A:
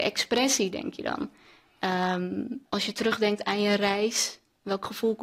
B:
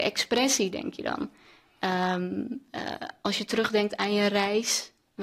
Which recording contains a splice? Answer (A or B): A